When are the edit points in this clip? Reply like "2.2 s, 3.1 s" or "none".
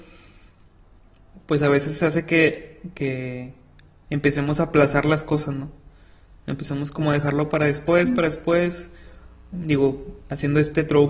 9.5 s